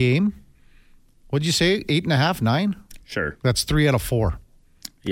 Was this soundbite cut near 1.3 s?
no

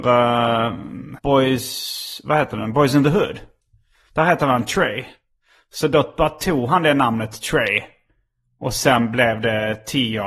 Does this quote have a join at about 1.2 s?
yes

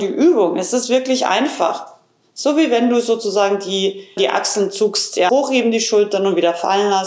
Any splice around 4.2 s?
yes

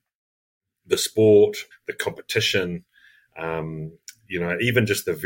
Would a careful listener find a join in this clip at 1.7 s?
yes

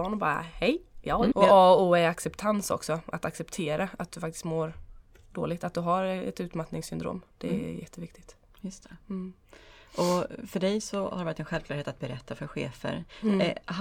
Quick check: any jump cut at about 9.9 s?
no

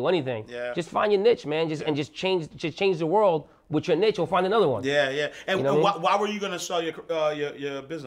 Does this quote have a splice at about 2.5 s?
yes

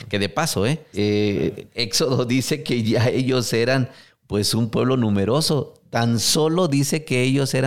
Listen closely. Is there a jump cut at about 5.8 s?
no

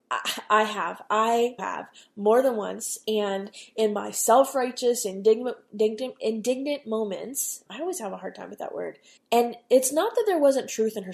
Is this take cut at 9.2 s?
yes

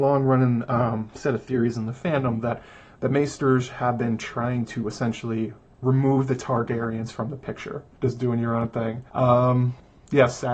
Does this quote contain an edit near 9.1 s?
yes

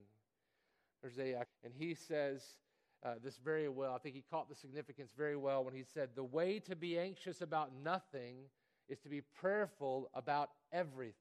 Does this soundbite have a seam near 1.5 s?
yes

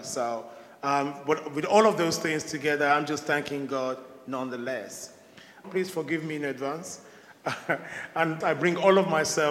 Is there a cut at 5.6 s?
yes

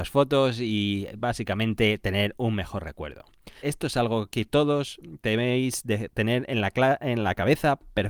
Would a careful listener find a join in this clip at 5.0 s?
no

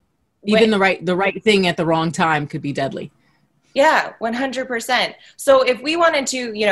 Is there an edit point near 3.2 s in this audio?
no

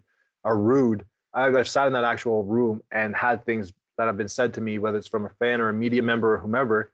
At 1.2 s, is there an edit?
yes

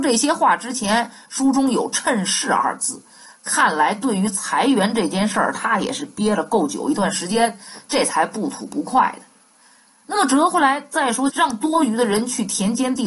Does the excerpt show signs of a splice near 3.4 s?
no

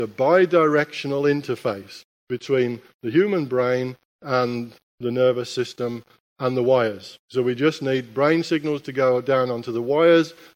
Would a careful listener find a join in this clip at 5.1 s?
no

